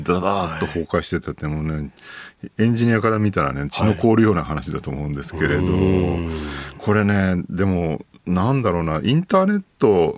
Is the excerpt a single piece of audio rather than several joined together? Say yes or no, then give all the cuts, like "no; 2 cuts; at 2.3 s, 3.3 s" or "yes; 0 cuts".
yes; 0 cuts